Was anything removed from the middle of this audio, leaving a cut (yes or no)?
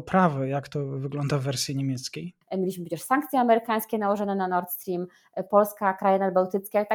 yes